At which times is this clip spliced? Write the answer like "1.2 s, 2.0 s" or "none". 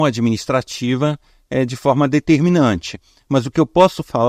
none